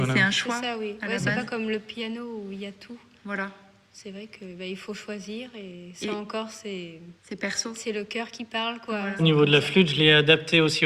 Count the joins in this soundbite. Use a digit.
2